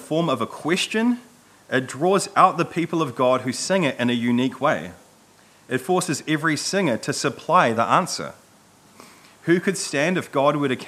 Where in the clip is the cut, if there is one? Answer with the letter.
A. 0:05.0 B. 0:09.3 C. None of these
C